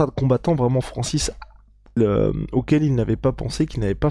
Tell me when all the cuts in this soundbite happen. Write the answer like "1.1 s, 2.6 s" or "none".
2.0 s